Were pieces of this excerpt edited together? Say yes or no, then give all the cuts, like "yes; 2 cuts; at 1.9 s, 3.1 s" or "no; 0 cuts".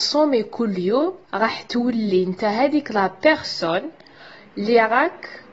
yes; 1 cut; at 1.2 s